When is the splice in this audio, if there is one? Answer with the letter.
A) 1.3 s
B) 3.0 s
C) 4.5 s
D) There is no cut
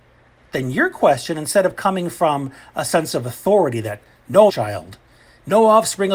C